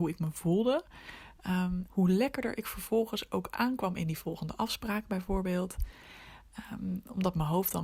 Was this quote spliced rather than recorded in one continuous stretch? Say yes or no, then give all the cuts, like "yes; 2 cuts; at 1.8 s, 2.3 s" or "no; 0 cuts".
yes; 1 cut; at 1.9 s